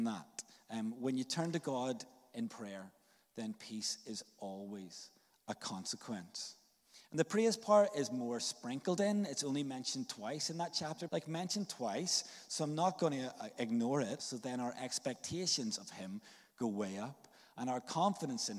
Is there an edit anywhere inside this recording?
yes; 2 cuts; at 11.1 s, 14.2 s

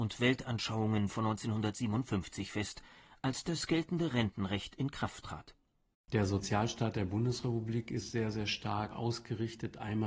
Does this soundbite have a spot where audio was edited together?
yes; 1 cut; at 5.9 s

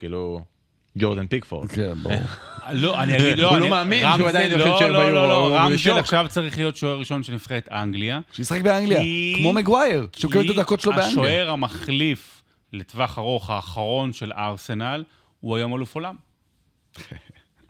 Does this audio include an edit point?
no; 0 cuts

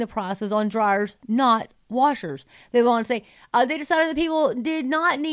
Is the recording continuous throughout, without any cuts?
yes; 0 cuts

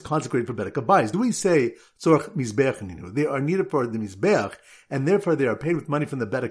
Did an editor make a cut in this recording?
no; 0 cuts

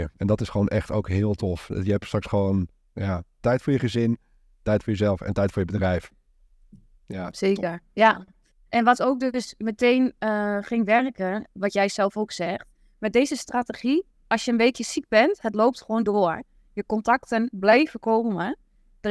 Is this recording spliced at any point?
no; 0 cuts

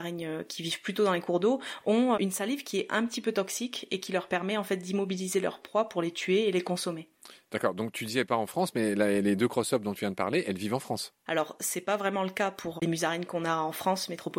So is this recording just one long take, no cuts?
no; 1 cut; at 11.3 s

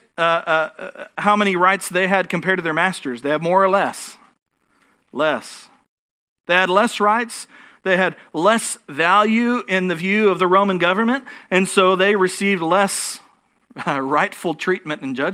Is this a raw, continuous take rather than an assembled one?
yes; 0 cuts

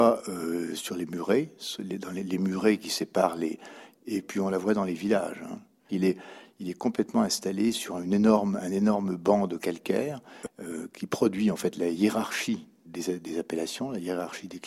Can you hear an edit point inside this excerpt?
yes; 3 cuts; at 3.9 s, 5.9 s, 12.8 s

